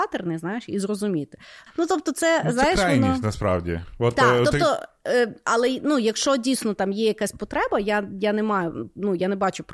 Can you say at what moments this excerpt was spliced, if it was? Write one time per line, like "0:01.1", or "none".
0:01.7